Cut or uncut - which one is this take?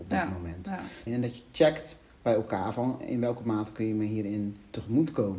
cut